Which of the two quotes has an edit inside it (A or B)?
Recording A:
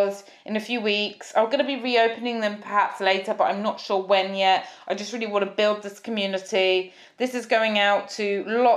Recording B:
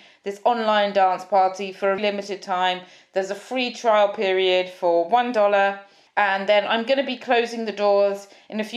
B